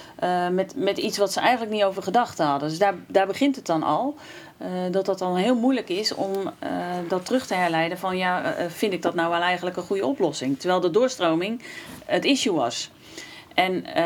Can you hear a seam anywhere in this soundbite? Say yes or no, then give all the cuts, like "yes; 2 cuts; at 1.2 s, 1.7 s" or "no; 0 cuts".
no; 0 cuts